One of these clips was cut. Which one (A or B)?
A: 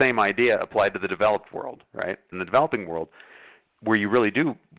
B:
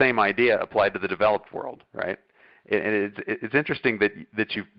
A